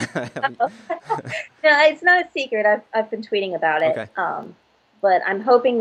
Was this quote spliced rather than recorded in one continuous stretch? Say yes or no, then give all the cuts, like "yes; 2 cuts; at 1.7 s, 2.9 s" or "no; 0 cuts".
no; 0 cuts